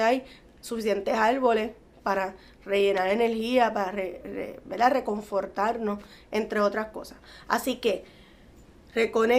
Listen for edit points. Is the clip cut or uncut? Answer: uncut